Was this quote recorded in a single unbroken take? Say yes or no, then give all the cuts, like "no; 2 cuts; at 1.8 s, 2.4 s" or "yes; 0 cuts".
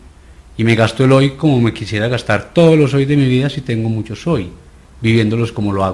yes; 0 cuts